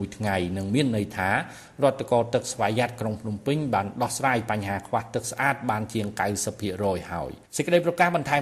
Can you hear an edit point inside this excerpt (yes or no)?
yes